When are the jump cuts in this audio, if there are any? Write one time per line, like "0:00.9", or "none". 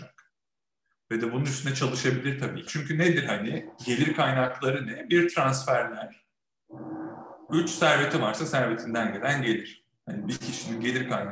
0:02.7
0:07.5